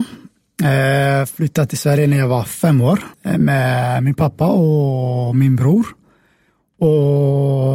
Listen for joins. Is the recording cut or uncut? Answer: cut